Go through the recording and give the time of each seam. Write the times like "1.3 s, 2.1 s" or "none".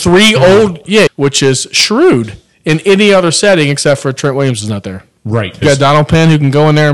1.1 s, 5.6 s